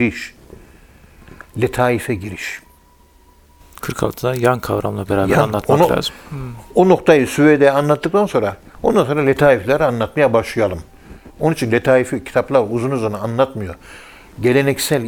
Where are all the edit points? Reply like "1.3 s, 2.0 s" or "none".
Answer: none